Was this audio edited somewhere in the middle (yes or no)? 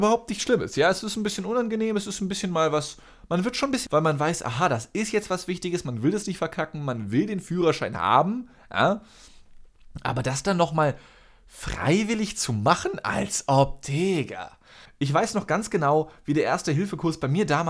yes